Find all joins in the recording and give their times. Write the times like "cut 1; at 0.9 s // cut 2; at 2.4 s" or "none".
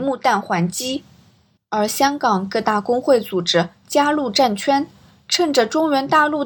cut 1; at 1.6 s